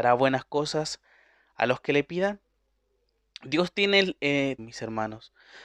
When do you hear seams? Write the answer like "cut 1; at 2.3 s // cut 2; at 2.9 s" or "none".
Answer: cut 1; at 4.6 s